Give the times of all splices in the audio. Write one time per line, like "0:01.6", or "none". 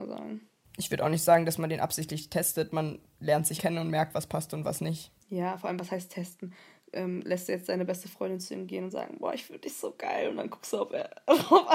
0:03.6
0:05.2